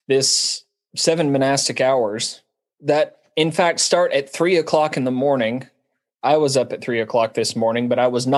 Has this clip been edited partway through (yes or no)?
no